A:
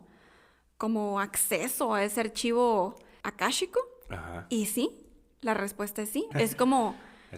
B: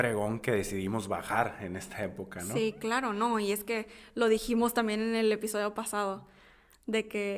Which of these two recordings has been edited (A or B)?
A